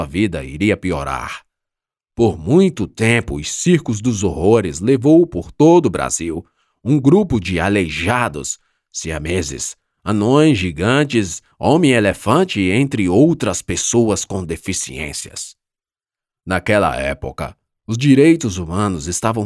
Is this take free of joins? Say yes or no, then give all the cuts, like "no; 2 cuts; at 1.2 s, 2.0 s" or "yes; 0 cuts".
yes; 0 cuts